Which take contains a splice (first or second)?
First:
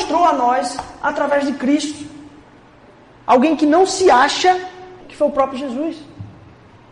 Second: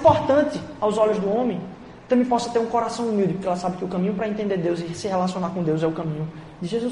first